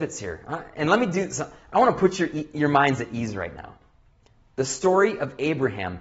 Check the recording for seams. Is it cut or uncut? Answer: uncut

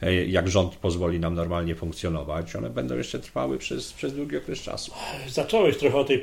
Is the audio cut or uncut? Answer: uncut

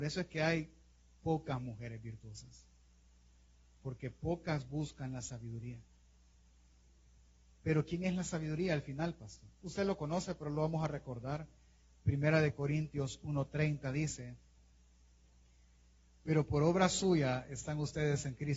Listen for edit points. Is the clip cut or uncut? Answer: uncut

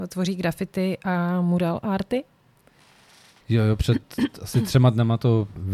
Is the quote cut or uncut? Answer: cut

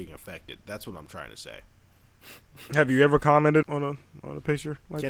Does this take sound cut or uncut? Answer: cut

